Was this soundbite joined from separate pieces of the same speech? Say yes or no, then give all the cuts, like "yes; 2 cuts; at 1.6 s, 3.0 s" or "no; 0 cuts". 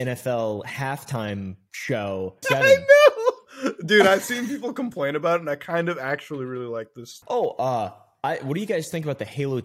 yes; 2 cuts; at 2.4 s, 7.2 s